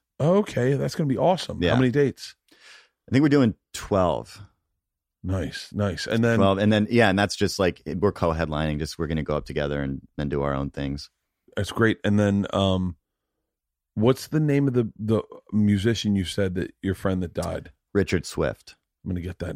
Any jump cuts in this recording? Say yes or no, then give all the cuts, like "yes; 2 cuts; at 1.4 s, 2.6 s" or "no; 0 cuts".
no; 0 cuts